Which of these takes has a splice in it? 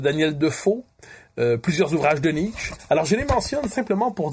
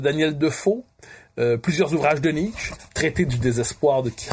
second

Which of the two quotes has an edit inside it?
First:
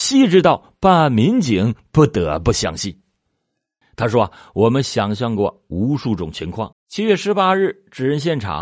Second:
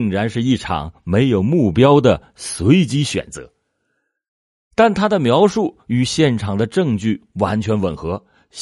first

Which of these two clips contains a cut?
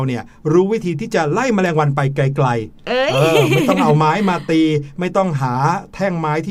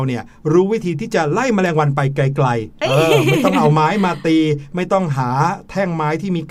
second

